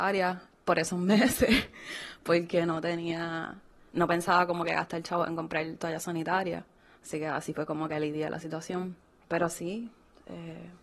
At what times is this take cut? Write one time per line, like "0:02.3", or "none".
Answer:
none